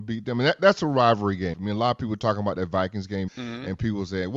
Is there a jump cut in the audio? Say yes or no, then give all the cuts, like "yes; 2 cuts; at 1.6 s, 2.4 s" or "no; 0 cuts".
yes; 2 cuts; at 1.5 s, 3.3 s